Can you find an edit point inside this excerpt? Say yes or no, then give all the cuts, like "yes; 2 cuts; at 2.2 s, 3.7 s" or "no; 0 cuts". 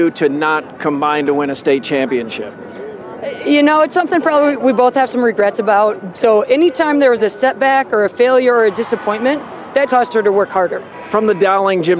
yes; 2 cuts; at 6.1 s, 9.9 s